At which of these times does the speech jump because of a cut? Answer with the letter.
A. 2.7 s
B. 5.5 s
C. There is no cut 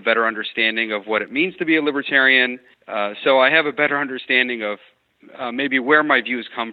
A